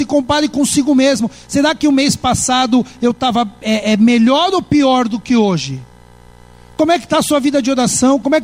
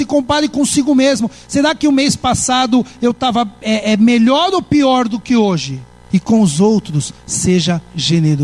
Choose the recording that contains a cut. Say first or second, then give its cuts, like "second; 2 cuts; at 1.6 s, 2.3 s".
second; 1 cut; at 6.0 s